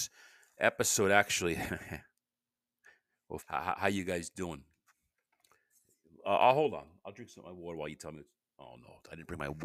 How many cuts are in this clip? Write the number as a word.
one